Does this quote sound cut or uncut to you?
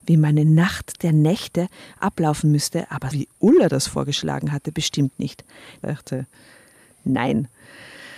cut